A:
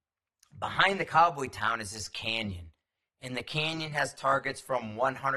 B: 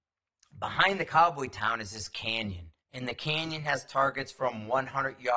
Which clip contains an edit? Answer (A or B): B